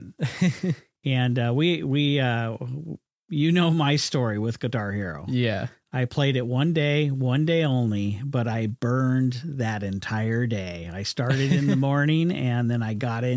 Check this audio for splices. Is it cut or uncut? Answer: uncut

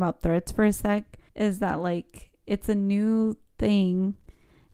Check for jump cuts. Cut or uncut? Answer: cut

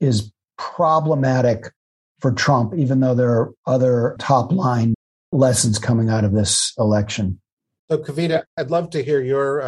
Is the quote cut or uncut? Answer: uncut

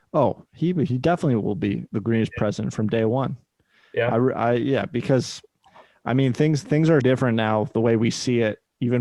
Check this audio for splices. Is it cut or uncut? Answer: cut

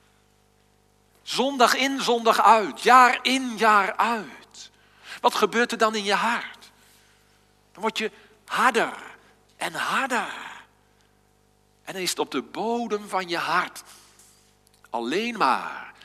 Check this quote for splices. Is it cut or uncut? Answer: cut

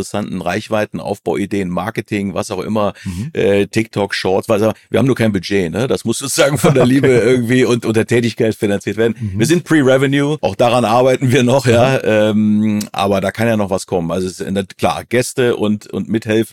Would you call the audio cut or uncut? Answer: cut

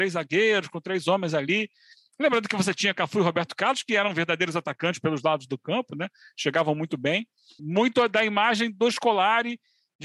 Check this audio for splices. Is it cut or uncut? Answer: cut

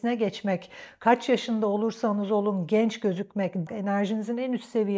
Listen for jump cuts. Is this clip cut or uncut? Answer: cut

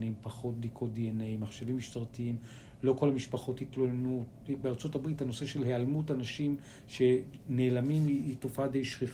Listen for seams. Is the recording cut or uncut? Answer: uncut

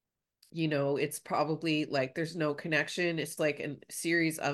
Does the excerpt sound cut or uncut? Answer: cut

